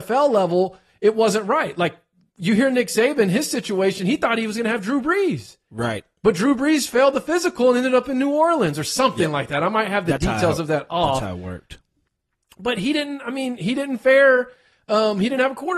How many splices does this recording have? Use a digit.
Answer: 0